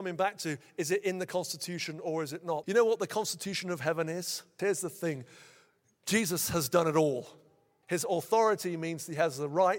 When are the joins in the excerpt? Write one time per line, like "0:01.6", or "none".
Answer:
0:02.6
0:04.6
0:07.8